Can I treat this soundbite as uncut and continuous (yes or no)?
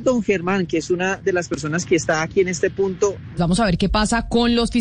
no